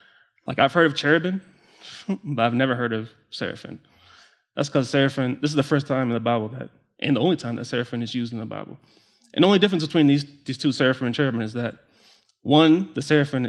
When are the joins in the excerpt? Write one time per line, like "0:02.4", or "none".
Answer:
none